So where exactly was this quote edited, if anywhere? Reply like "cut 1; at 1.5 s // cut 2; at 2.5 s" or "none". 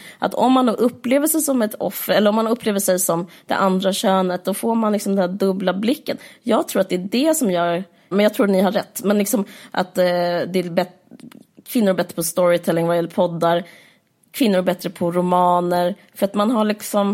cut 1; at 8.1 s